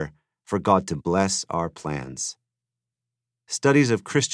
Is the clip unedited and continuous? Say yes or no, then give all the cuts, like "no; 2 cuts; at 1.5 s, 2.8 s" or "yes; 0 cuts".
yes; 0 cuts